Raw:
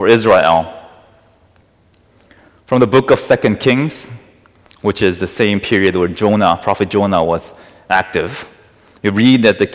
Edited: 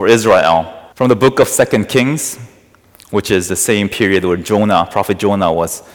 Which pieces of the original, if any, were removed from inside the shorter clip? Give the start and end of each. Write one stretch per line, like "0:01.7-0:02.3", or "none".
0:00.9-0:02.6